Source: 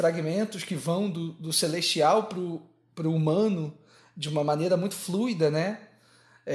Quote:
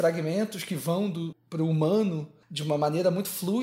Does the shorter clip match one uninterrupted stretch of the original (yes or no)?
no